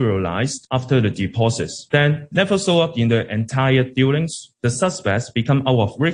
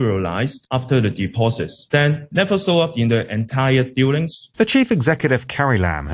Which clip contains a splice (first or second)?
second